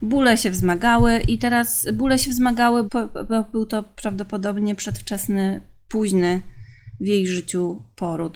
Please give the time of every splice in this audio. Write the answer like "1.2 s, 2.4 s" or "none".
2.9 s